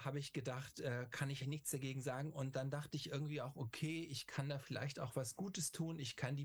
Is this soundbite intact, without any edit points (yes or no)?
no